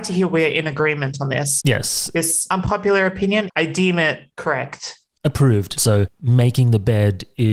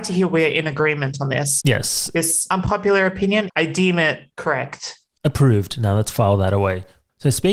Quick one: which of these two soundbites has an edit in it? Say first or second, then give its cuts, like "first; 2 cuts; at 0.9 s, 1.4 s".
first; 1 cut; at 5.8 s